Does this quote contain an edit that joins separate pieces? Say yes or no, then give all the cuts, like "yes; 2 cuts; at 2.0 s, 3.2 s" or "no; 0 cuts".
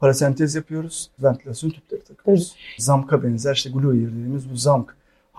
yes; 2 cuts; at 1.2 s, 2.8 s